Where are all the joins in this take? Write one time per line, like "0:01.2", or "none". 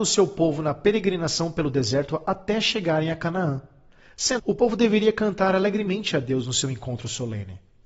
0:04.4